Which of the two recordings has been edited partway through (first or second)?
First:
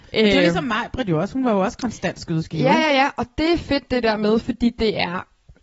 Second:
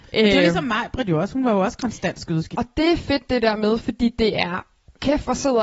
second